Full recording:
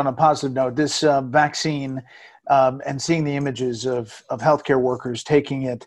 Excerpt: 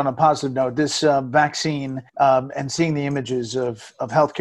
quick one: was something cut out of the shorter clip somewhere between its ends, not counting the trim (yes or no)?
yes